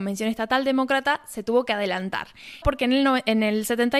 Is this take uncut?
no; 1 cut; at 2.6 s

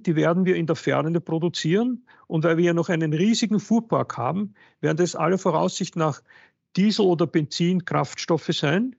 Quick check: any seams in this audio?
no; 0 cuts

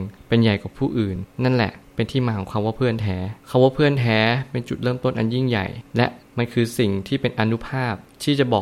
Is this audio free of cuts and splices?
yes; 0 cuts

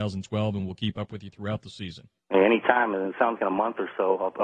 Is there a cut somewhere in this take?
yes; 2 cuts; at 2.2 s, 3.4 s

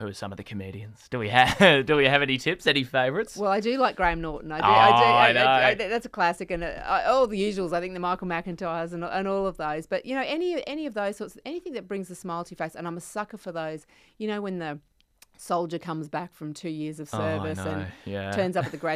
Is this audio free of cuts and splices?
yes; 0 cuts

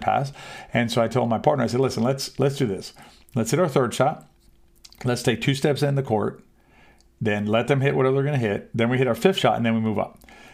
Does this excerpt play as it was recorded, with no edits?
yes; 0 cuts

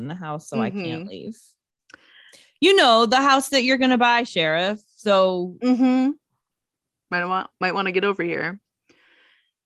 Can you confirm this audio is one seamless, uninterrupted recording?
yes; 0 cuts

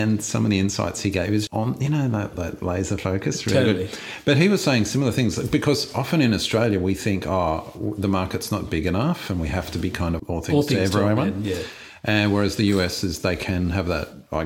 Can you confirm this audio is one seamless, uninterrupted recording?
no; 2 cuts; at 1.5 s, 10.2 s

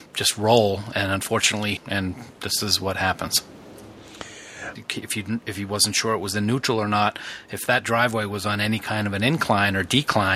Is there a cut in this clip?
yes; 2 cuts; at 1.8 s, 4.8 s

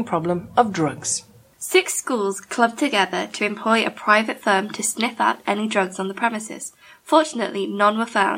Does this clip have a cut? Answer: no; 0 cuts

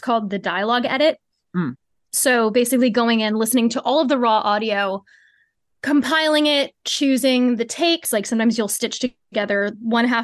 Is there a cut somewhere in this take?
yes; 1 cut; at 8.0 s

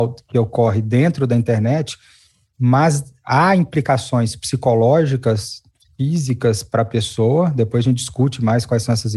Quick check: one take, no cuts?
yes; 0 cuts

